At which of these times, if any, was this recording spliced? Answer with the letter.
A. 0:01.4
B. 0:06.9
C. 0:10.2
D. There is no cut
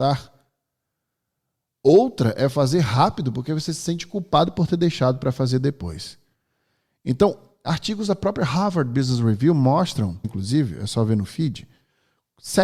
C